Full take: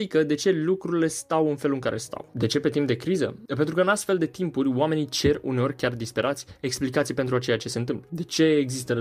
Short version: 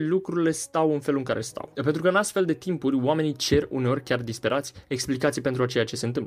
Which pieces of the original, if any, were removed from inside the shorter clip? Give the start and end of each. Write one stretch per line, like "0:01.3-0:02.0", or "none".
0:02.3-0:03.5